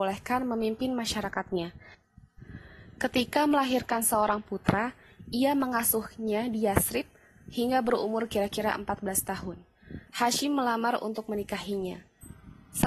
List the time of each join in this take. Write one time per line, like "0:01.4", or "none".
0:10.1